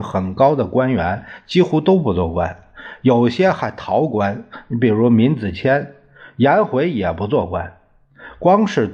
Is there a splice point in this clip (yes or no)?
no